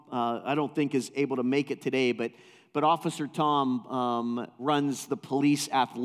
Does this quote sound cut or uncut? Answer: uncut